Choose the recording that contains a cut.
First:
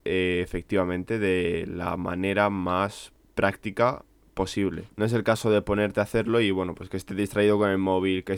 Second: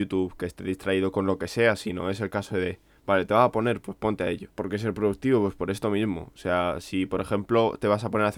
second; 1 cut; at 4.5 s

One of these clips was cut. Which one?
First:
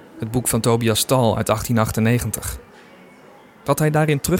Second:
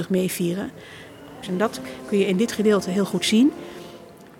second; 1 cut; at 1.4 s

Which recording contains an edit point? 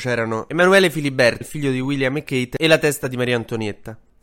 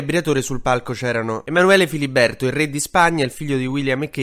first; 1 cut; at 1.4 s

